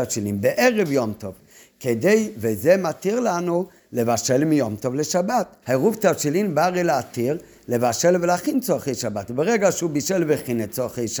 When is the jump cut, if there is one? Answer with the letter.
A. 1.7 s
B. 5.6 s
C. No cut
B